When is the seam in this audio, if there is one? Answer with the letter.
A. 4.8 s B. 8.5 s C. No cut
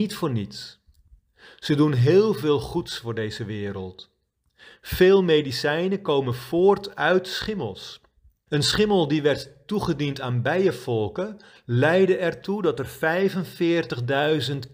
B